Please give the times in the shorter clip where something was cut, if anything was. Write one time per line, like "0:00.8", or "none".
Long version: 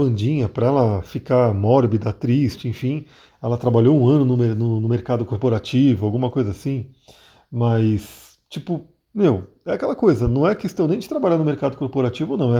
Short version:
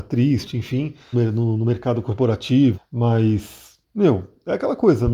0:01.1
0:02.7
0:03.8